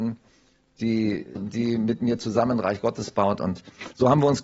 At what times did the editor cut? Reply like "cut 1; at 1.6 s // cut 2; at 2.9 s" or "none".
cut 1; at 1.4 s